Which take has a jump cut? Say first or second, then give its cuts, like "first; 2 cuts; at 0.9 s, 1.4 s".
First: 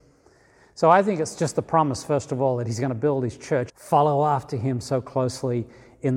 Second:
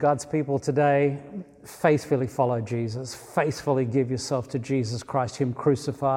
first; 1 cut; at 3.7 s